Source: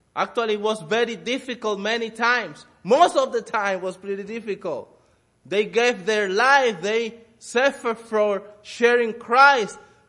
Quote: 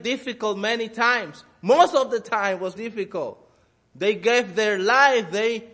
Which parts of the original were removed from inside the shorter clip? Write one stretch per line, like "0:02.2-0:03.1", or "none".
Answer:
0:04.0-0:04.3